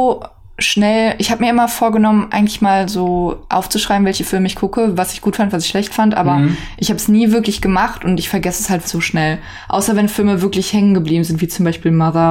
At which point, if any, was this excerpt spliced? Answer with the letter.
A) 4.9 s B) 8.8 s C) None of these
B